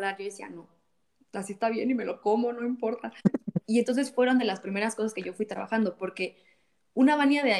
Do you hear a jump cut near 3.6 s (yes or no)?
yes